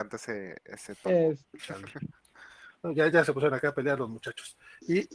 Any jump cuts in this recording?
yes; 2 cuts; at 1.6 s, 3.1 s

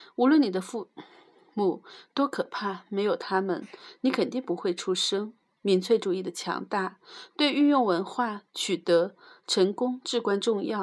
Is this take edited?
no; 0 cuts

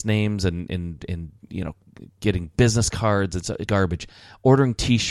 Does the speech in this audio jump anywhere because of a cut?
yes; 2 cuts; at 1.4 s, 3.7 s

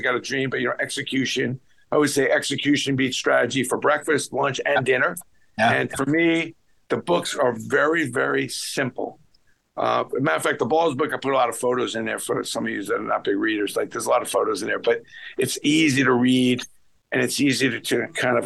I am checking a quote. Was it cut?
no; 0 cuts

